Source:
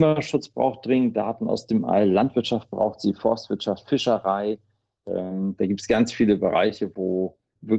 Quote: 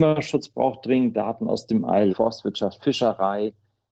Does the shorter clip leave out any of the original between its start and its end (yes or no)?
yes